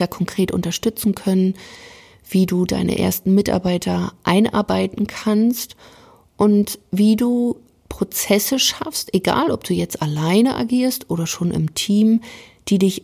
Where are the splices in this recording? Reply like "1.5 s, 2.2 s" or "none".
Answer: none

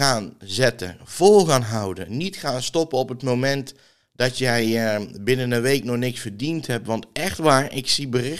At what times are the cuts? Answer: none

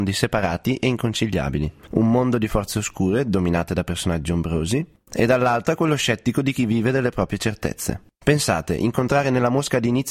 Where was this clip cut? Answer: none

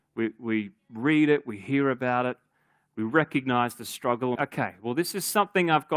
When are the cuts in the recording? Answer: 4.3 s

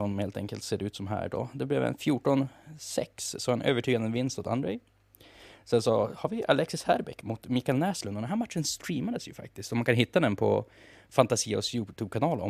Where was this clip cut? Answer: none

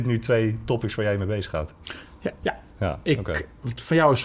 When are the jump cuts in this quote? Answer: 2.4 s

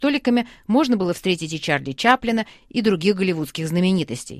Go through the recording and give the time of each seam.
2.6 s

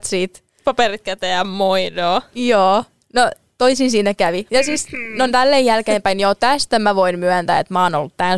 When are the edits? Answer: none

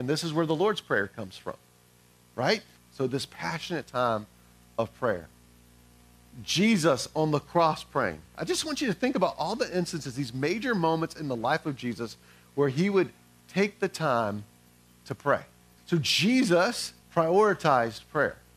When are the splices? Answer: 2.8 s, 15.8 s, 17.0 s

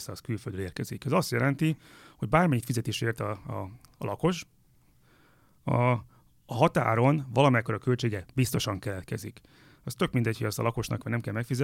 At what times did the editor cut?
none

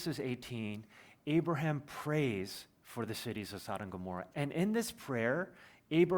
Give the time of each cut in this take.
4.3 s

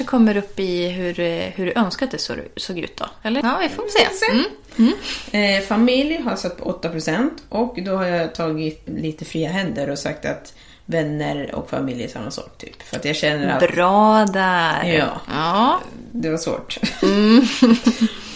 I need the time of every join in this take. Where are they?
3.4 s, 8.9 s

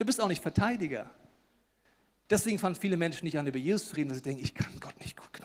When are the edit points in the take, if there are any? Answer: none

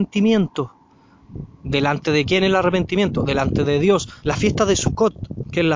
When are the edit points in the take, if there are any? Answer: 4.2 s

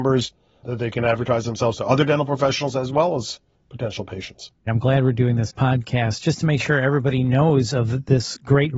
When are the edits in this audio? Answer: 4.7 s

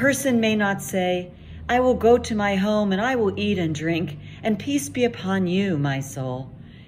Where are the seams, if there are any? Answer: none

